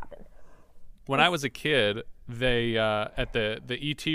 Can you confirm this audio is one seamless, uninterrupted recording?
yes; 0 cuts

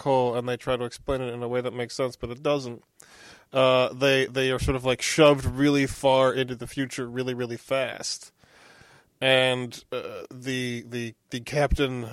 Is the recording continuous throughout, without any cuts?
yes; 0 cuts

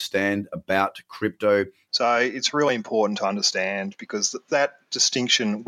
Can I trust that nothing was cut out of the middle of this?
no; 2 cuts; at 1.9 s, 4.5 s

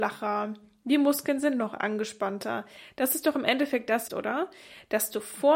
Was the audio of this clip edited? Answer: yes; 2 cuts; at 2.9 s, 4.1 s

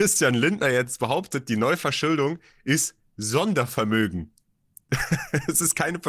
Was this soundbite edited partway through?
no; 0 cuts

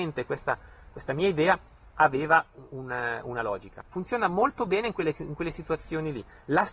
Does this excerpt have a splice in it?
yes; 1 cut; at 3.8 s

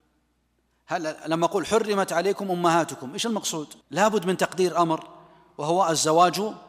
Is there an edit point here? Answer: yes; 1 cut; at 3.8 s

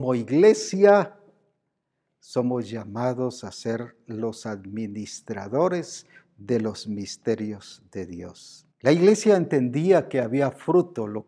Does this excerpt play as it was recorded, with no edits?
no; 1 cut; at 8.7 s

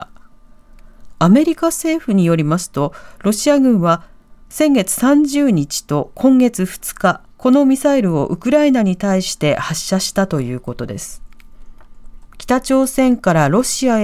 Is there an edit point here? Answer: yes; 1 cut; at 7.3 s

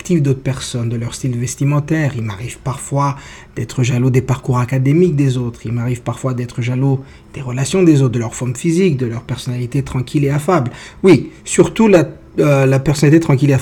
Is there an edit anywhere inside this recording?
no; 0 cuts

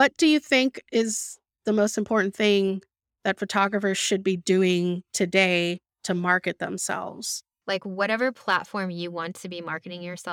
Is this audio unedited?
no; 1 cut; at 7.6 s

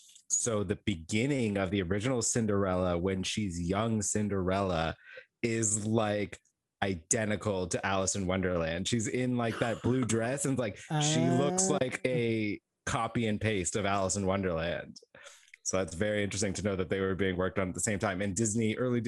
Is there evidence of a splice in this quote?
no; 0 cuts

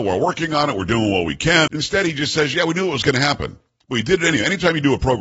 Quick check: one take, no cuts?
no; 1 cut; at 1.7 s

